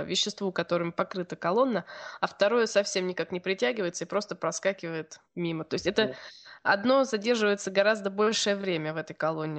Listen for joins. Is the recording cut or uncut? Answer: cut